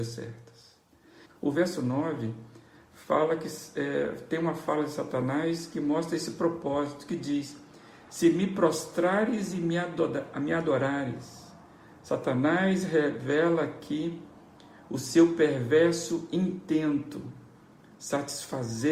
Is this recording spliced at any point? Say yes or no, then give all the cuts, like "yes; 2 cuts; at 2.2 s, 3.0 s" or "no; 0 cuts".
yes; 1 cut; at 1.3 s